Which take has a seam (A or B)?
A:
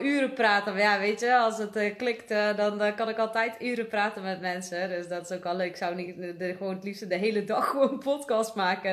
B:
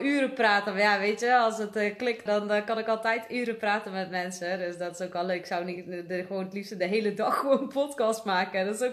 B